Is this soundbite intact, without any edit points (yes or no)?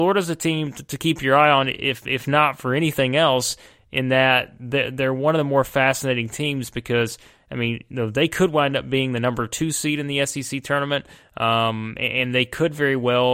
yes